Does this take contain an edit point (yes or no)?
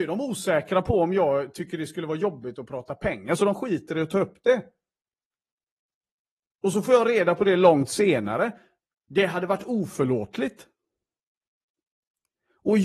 no